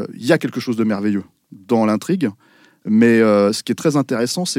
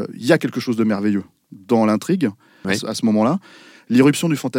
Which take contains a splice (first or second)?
second